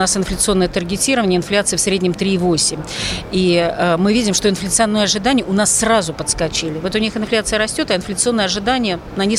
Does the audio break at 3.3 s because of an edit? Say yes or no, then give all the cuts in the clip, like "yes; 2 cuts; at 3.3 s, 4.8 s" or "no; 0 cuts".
no; 0 cuts